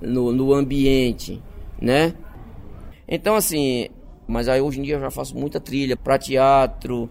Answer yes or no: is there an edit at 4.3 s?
yes